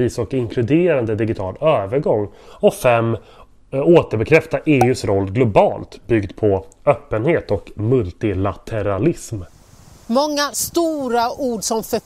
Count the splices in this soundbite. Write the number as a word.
one